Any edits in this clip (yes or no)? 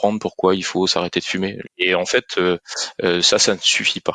yes